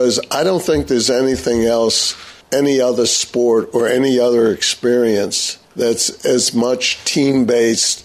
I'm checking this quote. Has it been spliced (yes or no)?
yes